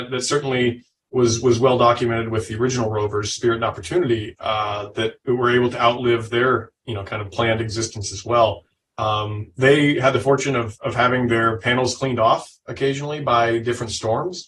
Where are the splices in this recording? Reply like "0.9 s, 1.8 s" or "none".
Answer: none